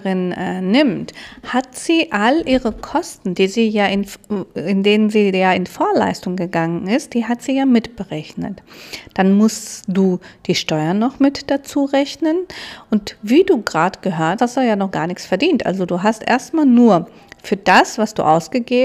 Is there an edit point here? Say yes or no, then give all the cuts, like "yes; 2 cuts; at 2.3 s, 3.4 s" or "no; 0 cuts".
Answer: yes; 1 cut; at 14.4 s